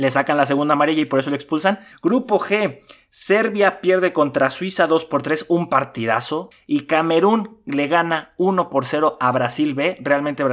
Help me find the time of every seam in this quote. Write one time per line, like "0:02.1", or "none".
0:01.9
0:06.5